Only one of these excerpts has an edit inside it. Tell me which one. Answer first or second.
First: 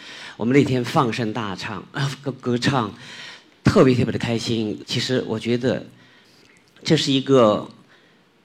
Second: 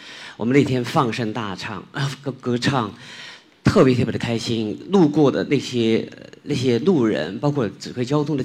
first